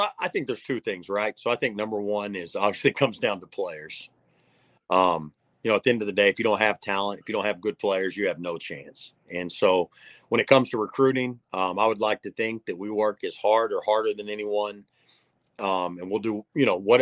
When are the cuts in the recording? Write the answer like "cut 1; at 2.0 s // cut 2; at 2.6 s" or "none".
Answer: none